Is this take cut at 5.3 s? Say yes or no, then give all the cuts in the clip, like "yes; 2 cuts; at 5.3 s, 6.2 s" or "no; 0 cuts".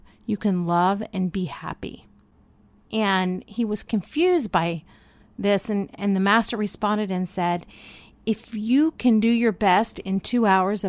no; 1 cut; at 2.9 s